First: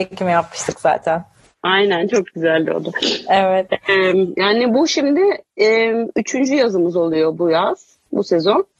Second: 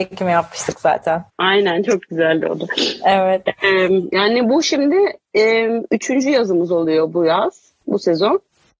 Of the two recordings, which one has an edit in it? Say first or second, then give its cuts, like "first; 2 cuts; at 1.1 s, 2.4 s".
second; 1 cut; at 1.3 s